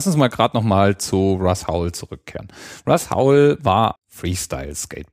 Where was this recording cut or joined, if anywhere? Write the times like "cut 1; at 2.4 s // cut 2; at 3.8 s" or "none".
cut 1; at 4.0 s